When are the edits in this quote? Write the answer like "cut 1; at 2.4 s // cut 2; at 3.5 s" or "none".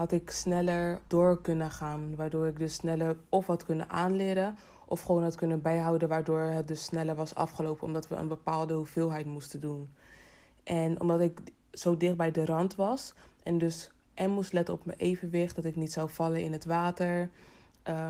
cut 1; at 1.1 s